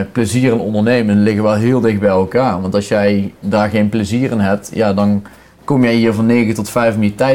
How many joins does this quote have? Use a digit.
0